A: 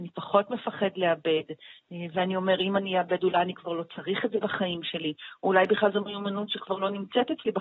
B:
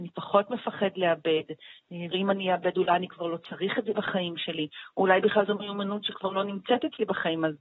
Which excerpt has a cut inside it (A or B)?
B